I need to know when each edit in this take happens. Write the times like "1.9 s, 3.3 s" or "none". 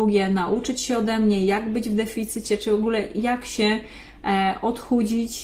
none